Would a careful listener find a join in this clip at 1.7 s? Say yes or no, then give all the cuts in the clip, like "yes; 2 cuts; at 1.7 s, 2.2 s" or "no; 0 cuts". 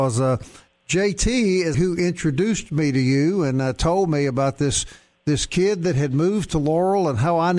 yes; 1 cut; at 1.7 s